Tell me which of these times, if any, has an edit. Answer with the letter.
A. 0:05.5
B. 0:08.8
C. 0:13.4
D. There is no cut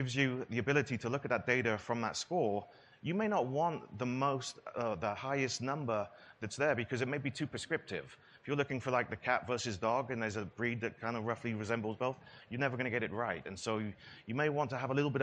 D